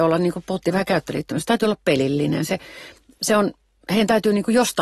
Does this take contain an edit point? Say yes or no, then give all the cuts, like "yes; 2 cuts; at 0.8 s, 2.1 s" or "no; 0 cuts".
no; 0 cuts